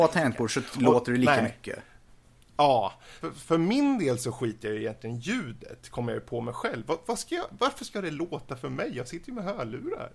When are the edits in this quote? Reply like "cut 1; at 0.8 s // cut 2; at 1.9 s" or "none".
cut 1; at 3.2 s